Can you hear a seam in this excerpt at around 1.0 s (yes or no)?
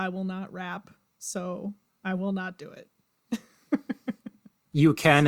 no